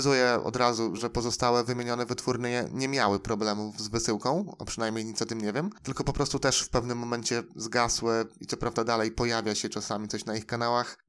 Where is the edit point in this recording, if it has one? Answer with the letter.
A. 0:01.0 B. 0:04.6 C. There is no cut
A